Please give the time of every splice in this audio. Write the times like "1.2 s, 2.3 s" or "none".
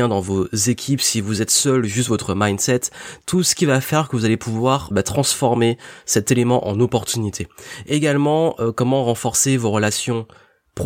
4.9 s